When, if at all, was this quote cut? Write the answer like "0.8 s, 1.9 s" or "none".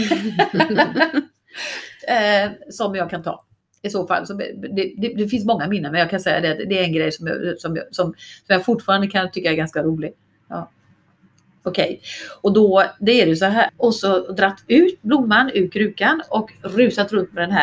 13.7 s